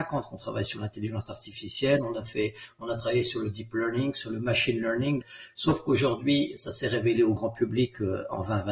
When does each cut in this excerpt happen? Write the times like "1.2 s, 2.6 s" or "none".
5.2 s